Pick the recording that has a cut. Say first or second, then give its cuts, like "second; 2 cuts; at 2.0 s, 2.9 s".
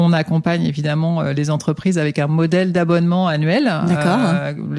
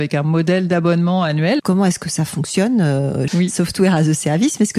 second; 2 cuts; at 1.6 s, 3.3 s